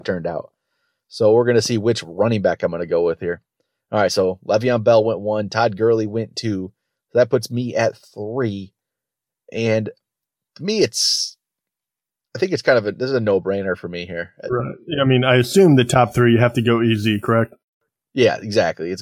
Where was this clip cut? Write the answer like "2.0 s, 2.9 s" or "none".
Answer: none